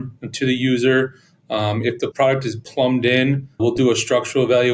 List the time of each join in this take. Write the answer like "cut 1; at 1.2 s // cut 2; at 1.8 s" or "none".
cut 1; at 2.1 s // cut 2; at 3.6 s